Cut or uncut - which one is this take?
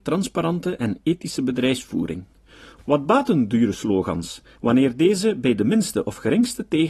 cut